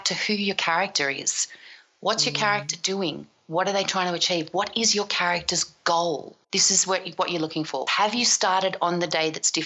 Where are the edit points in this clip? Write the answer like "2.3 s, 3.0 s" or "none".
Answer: 6.4 s, 7.9 s